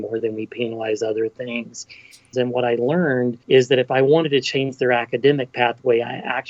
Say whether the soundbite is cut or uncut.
cut